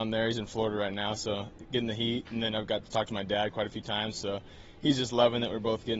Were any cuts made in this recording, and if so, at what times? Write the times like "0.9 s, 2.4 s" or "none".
none